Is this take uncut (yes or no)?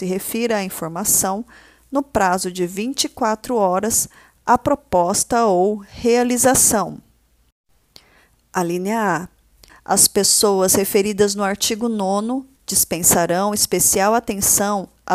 no